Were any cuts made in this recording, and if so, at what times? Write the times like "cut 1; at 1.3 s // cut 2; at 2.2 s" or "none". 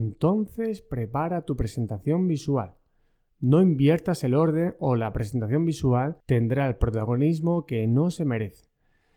cut 1; at 6.2 s